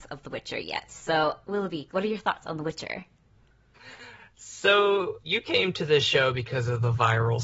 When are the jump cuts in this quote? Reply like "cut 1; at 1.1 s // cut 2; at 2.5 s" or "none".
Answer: cut 1; at 5.2 s